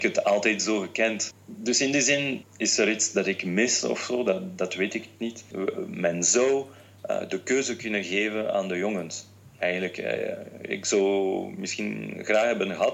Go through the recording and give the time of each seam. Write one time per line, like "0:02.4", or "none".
0:01.3
0:02.4